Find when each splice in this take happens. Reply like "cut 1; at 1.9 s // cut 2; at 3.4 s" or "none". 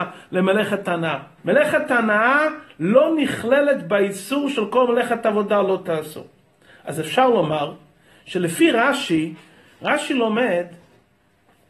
cut 1; at 1.4 s